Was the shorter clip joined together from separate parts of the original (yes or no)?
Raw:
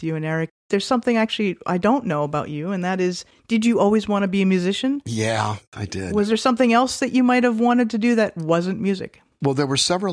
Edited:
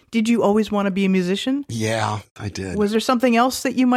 no